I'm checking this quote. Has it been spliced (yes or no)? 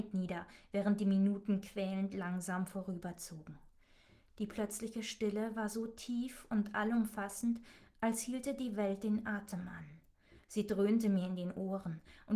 no